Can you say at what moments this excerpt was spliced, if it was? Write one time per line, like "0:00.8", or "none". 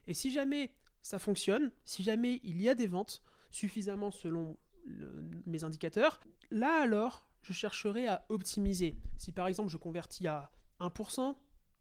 none